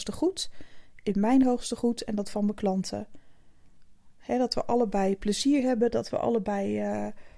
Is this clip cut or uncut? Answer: uncut